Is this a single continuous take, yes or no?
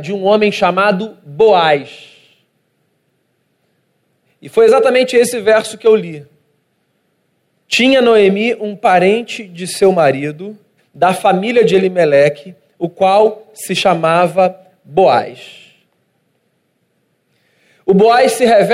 no